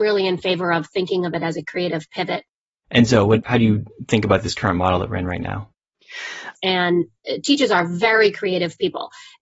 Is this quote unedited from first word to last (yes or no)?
no